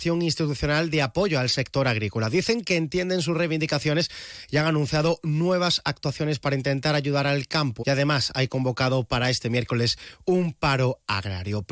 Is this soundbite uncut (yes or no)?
no